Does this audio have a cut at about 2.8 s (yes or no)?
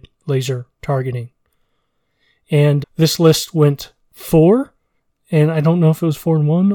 yes